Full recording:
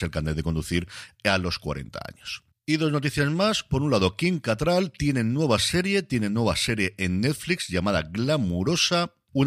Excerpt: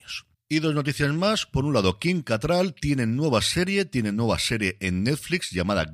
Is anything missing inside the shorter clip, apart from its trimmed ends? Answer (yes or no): no